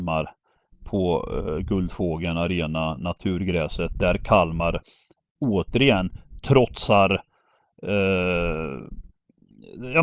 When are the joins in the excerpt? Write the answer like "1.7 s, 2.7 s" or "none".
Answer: none